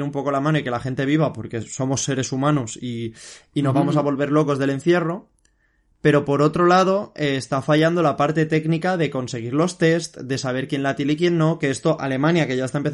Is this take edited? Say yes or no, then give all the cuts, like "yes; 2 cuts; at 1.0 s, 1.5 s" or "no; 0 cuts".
no; 0 cuts